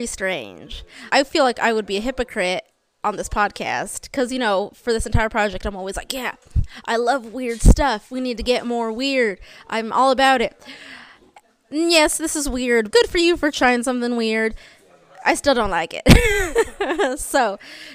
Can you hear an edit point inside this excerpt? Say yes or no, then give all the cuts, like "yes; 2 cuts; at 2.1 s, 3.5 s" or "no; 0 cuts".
yes; 1 cut; at 12.9 s